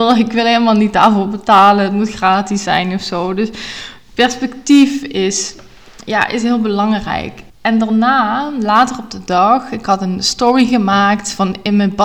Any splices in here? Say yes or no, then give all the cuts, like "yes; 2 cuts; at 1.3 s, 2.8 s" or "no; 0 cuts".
yes; 1 cut; at 7.5 s